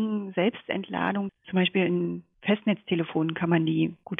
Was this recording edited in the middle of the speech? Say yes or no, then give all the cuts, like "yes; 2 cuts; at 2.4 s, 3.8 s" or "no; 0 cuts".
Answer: yes; 1 cut; at 1.3 s